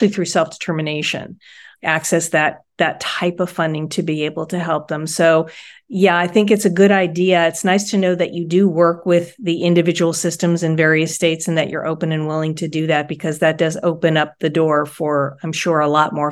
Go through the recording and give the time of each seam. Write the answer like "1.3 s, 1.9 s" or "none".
none